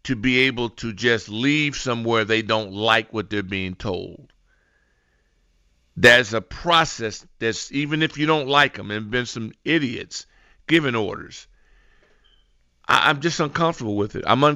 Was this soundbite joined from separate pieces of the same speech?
no; 0 cuts

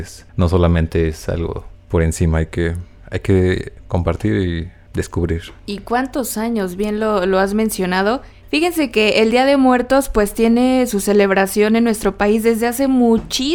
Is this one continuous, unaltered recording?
yes; 0 cuts

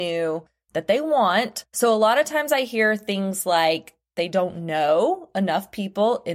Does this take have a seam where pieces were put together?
no; 0 cuts

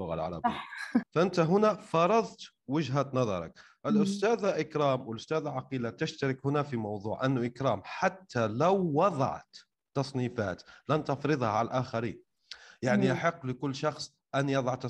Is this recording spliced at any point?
yes; 1 cut; at 1.0 s

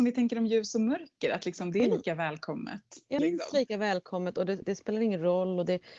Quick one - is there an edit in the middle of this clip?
yes; 2 cuts; at 3.2 s, 4.6 s

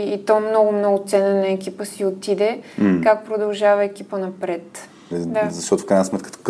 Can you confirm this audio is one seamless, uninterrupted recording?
no; 1 cut; at 5.1 s

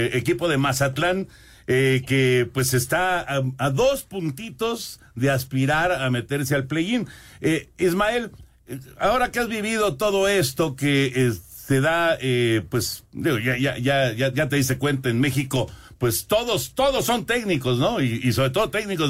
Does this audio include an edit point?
no; 0 cuts

